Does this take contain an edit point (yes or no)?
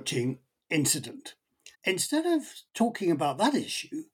yes